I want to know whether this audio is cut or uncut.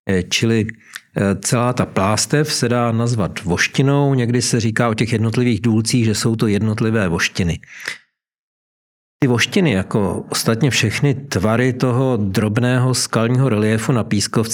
uncut